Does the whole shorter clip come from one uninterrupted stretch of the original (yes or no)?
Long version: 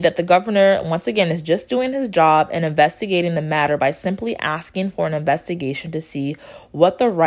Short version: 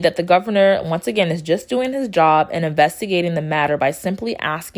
yes